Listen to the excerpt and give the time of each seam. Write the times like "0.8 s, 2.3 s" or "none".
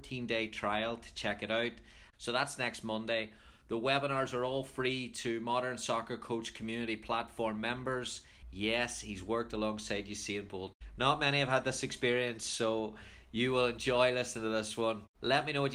2.1 s, 8.4 s